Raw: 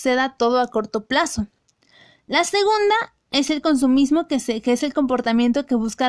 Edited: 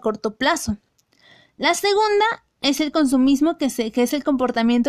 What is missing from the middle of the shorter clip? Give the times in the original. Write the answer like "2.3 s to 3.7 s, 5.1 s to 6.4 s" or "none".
none